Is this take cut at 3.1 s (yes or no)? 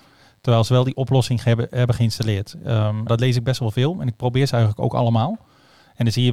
yes